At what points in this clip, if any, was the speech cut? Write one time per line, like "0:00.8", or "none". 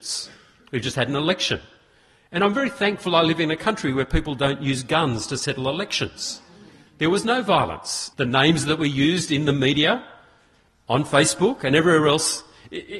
0:08.1